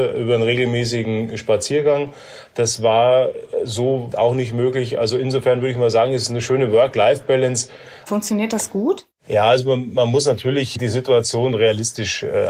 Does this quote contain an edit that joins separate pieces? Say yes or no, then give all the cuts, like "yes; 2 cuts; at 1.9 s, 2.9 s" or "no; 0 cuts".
yes; 2 cuts; at 4.1 s, 8.1 s